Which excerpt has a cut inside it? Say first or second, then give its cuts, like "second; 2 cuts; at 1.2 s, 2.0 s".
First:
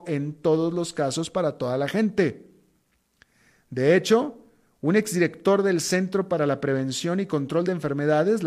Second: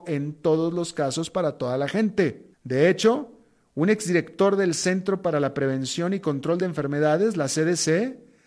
second; 1 cut; at 2.5 s